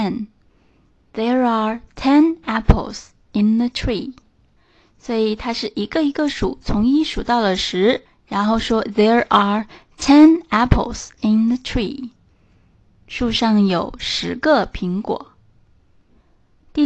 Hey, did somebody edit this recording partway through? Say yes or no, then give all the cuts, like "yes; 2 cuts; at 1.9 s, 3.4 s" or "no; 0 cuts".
no; 0 cuts